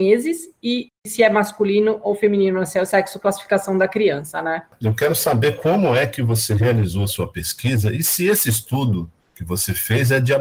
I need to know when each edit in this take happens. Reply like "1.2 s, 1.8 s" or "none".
4.8 s